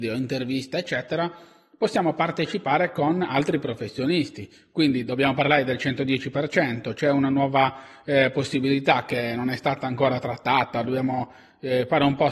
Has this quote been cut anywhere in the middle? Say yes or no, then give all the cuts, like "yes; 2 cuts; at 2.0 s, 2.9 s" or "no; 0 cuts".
no; 0 cuts